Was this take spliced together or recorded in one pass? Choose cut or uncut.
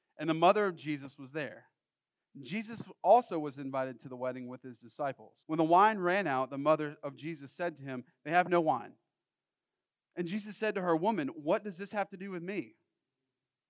cut